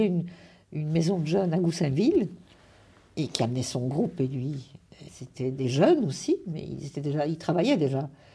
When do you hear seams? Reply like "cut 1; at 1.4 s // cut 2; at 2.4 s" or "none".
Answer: cut 1; at 5.1 s